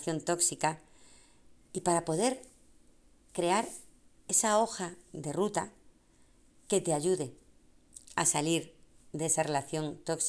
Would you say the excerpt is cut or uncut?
uncut